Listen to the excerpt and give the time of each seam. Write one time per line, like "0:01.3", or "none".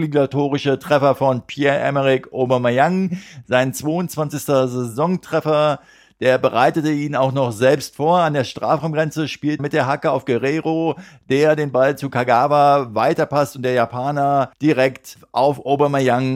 0:09.6